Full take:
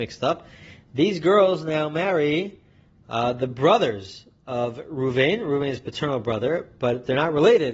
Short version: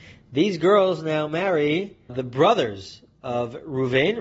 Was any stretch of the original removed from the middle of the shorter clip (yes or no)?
yes